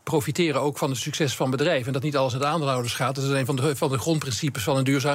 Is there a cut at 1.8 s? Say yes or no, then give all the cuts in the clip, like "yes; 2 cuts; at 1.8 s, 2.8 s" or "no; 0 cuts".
no; 0 cuts